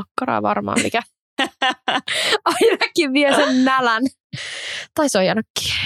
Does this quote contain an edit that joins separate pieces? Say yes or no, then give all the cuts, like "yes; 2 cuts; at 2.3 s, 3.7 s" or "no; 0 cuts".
no; 0 cuts